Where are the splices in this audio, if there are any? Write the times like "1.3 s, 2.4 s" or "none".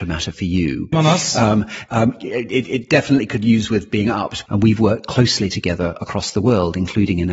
0.9 s, 4.5 s